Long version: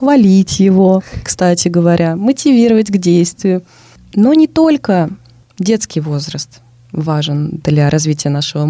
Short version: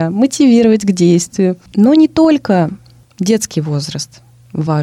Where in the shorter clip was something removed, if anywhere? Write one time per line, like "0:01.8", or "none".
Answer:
0:01.7